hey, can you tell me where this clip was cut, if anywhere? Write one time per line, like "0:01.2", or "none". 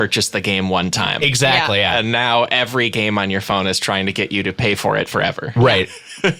none